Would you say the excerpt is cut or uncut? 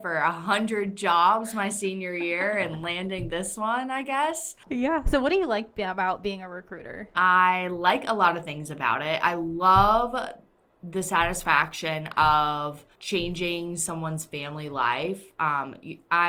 cut